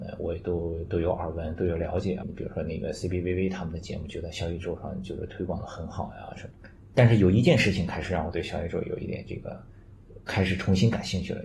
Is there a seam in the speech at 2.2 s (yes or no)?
yes